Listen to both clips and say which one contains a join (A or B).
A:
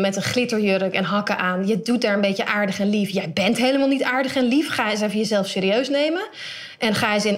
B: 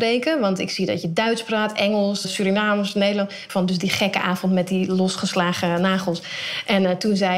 B